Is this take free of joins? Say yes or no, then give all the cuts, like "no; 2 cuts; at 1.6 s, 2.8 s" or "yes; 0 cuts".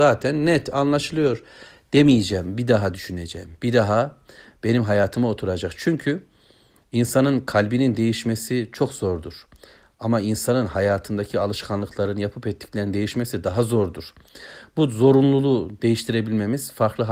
yes; 0 cuts